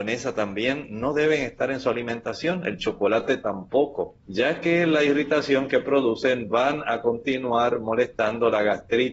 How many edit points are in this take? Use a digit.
1